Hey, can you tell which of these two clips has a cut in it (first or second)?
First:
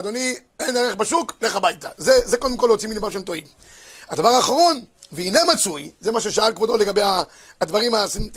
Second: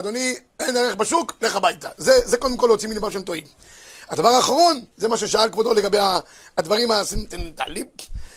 second